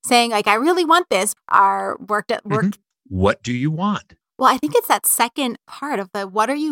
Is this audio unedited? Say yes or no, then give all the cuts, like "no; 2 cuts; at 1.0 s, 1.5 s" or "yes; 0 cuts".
no; 3 cuts; at 1.4 s, 2.9 s, 4.2 s